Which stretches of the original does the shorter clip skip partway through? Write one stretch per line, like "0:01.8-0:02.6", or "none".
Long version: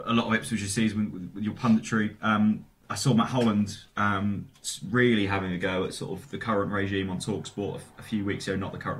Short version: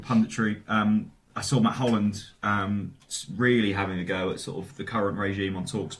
none